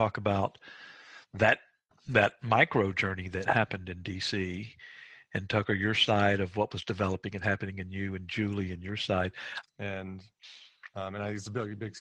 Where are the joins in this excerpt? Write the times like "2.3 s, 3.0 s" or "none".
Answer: 9.6 s